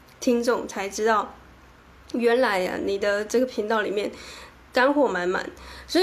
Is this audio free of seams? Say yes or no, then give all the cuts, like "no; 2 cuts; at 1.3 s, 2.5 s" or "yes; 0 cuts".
yes; 0 cuts